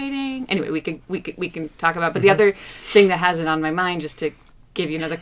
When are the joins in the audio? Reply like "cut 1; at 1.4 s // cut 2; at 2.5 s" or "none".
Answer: none